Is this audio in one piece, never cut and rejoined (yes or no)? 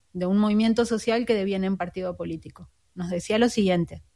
yes